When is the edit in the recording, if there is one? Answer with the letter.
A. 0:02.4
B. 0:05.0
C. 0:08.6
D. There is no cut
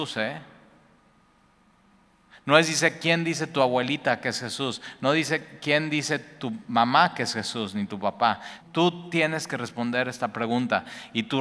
C